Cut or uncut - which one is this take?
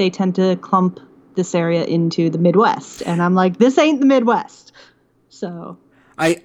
uncut